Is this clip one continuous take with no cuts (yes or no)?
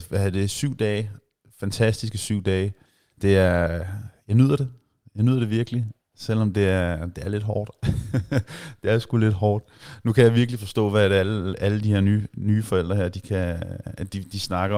yes